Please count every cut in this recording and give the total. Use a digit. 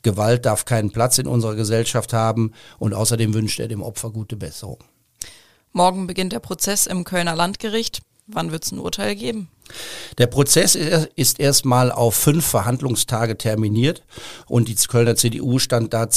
1